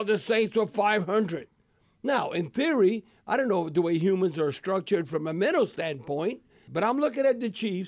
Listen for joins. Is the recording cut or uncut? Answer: cut